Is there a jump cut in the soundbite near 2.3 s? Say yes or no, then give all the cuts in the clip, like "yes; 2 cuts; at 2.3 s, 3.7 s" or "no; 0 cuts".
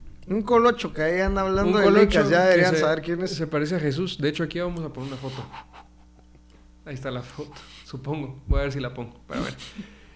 no; 0 cuts